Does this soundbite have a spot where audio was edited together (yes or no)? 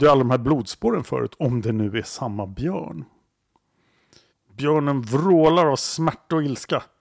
yes